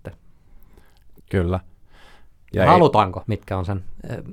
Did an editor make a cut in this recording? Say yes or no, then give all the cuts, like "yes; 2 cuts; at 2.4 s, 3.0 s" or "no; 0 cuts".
yes; 2 cuts; at 1.2 s, 3.2 s